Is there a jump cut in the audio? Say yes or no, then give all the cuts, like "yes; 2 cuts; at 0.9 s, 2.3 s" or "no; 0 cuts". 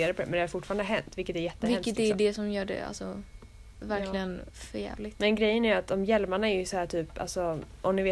no; 0 cuts